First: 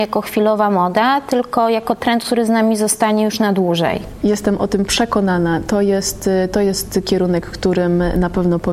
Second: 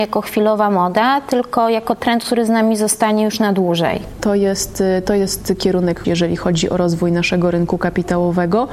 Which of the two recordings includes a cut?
second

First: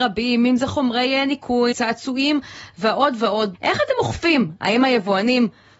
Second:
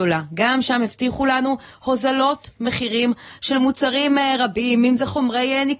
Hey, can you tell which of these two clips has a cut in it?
first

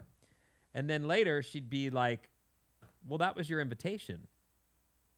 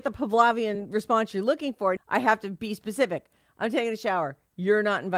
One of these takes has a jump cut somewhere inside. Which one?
second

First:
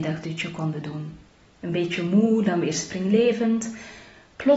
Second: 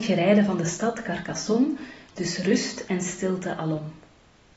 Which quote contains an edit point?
first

